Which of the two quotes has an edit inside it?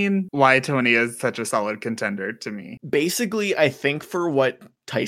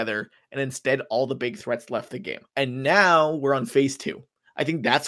second; 1 cut; at 2.5 s

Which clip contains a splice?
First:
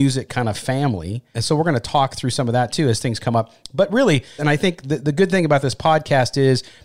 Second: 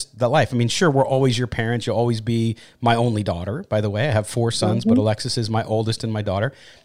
first; 2 cuts; at 1.3 s, 4.4 s

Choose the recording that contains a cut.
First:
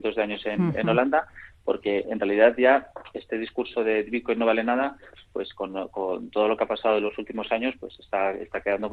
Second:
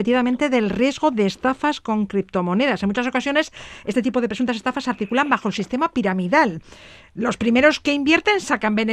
first; 1 cut; at 2.0 s

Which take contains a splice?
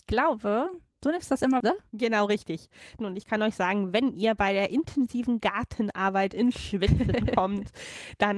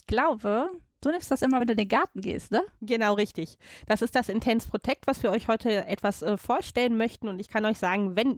first; 2 cuts; at 1.6 s, 3.0 s

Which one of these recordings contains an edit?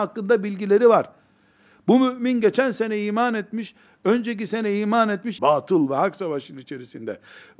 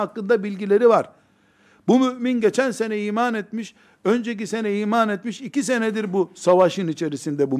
first; 1 cut; at 5.4 s

